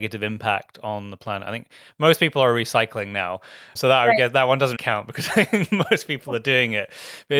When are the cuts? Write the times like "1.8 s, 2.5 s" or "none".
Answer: 3.7 s, 4.7 s